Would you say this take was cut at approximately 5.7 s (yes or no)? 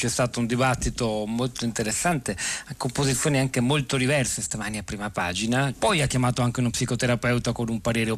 yes